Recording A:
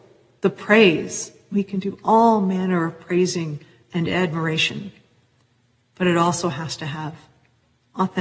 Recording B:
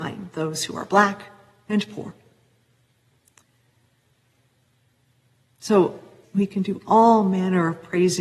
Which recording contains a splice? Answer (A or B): B